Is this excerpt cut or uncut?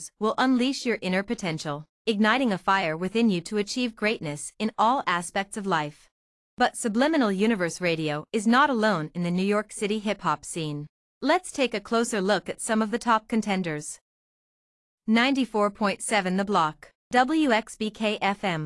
cut